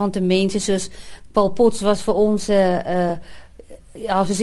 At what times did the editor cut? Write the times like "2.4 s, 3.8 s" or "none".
none